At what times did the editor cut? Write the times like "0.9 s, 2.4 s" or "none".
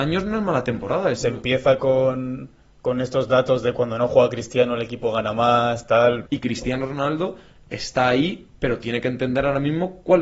1.1 s, 6.2 s